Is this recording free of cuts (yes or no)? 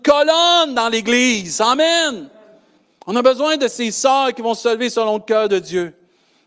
yes